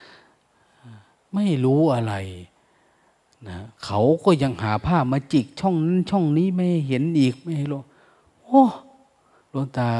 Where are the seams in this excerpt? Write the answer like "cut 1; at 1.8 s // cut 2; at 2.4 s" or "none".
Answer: none